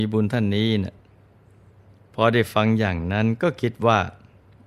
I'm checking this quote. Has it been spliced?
no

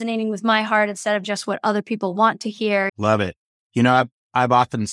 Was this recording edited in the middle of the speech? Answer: yes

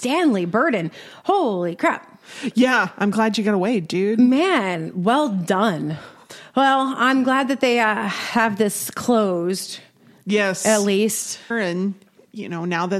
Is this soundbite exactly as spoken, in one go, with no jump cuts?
no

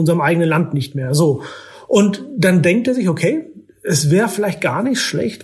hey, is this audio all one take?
yes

